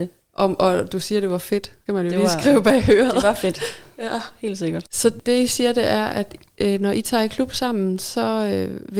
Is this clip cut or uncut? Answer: uncut